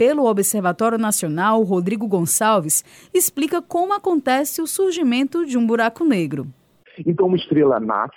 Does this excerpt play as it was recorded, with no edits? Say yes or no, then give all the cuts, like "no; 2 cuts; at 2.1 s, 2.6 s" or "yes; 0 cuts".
yes; 0 cuts